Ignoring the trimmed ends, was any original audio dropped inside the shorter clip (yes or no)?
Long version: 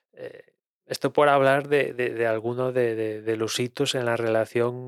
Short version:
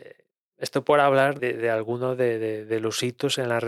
yes